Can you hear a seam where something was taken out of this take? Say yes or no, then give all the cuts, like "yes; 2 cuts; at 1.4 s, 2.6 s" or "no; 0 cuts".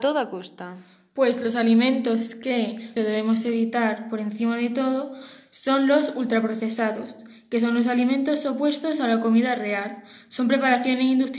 yes; 1 cut; at 3.0 s